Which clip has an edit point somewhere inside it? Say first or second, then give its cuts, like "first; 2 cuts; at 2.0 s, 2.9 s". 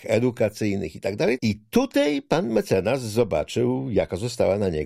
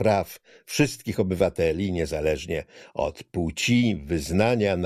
first; 1 cut; at 1.4 s